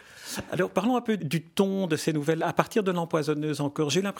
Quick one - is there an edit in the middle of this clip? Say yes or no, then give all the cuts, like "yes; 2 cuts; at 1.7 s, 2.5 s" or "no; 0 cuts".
yes; 1 cut; at 1.2 s